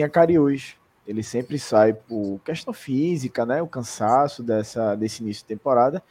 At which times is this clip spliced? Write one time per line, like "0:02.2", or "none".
0:01.0